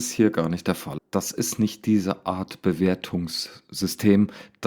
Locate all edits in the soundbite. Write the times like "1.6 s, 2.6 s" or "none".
1.0 s